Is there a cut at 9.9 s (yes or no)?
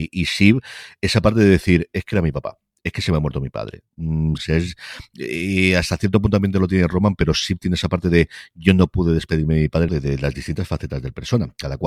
yes